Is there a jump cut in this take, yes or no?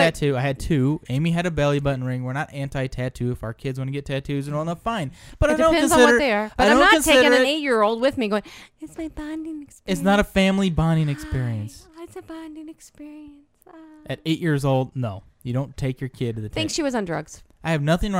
no